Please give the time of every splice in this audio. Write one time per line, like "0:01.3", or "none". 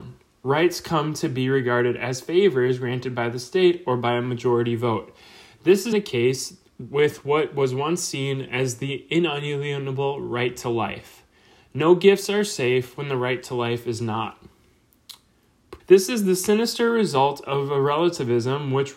0:05.9
0:15.8